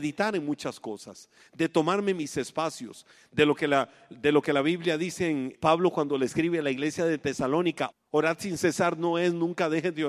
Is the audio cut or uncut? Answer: cut